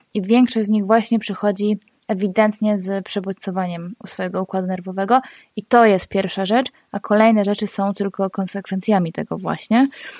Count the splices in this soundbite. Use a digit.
0